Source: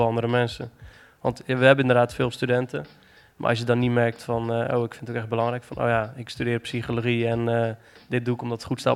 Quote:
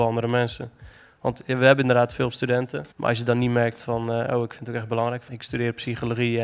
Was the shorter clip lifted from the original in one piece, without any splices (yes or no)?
no